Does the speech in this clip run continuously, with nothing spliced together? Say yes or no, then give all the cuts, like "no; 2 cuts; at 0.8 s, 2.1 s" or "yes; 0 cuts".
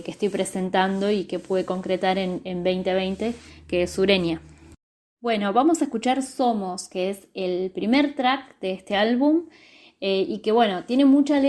yes; 0 cuts